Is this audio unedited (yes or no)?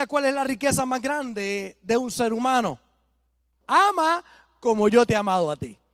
no